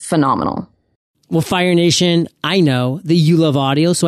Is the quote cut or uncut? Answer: uncut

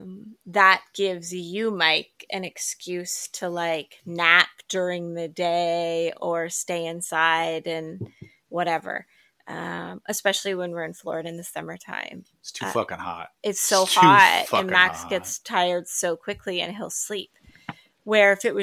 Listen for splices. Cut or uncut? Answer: uncut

